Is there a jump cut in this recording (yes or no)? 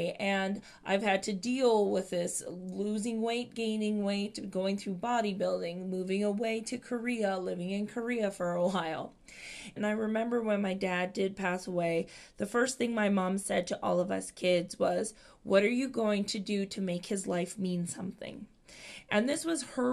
yes